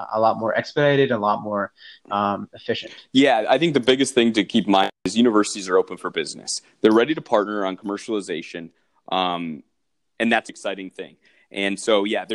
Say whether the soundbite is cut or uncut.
cut